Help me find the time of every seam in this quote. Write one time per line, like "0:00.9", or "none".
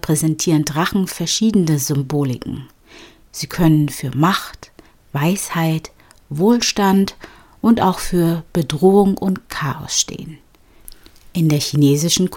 none